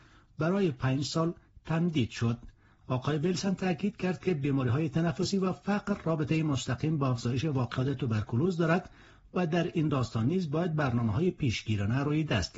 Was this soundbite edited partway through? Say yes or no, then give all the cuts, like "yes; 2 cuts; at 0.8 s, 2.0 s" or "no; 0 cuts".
yes; 1 cut; at 2.8 s